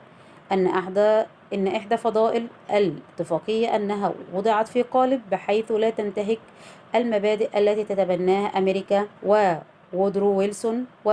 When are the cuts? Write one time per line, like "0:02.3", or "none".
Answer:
0:09.2